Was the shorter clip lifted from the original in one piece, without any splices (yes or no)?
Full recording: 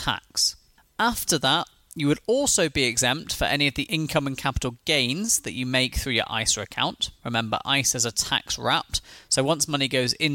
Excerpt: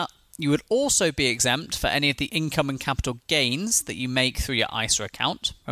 yes